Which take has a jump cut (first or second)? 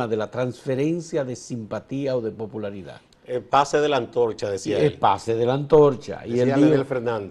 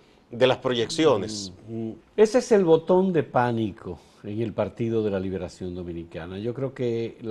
second